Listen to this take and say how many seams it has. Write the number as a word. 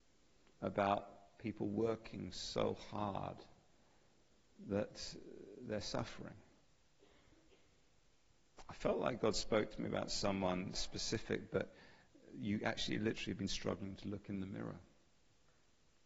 one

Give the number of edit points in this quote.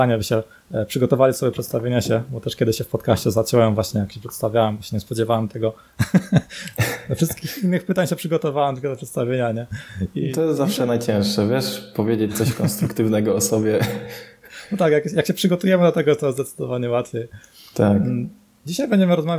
zero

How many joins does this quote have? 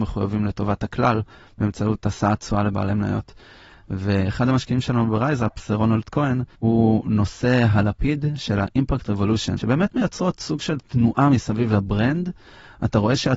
two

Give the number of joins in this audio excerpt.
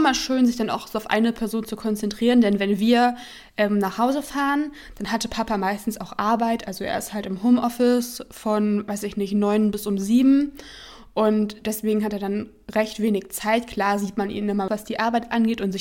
one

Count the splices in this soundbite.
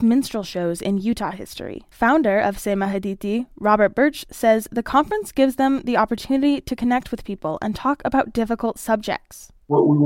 one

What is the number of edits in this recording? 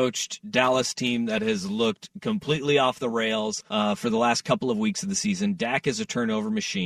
one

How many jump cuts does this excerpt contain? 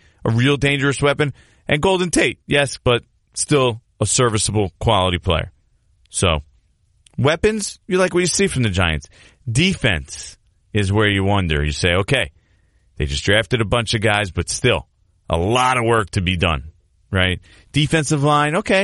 one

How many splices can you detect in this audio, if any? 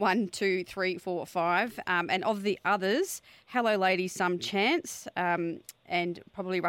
zero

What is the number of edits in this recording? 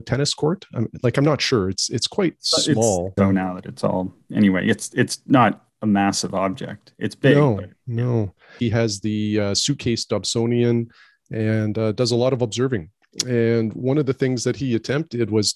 two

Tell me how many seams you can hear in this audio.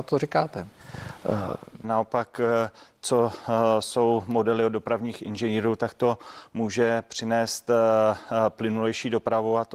one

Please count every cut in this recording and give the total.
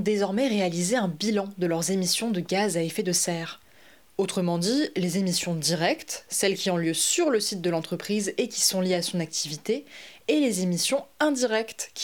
one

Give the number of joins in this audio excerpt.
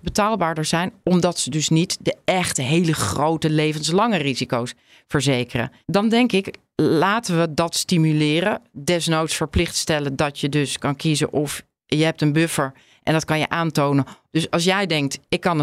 two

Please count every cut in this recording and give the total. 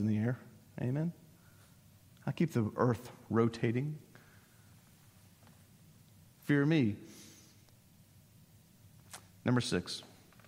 zero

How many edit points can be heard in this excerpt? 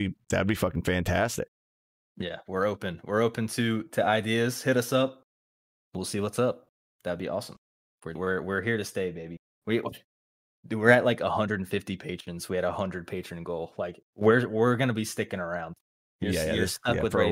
one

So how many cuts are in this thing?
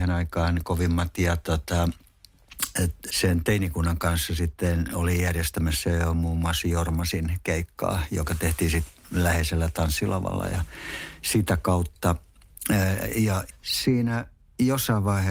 two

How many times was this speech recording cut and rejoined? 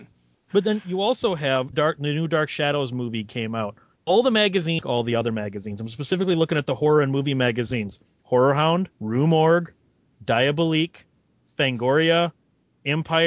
three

